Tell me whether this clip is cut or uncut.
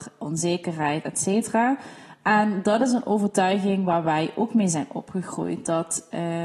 uncut